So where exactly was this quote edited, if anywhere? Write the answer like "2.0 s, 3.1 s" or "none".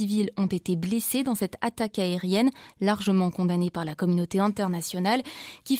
none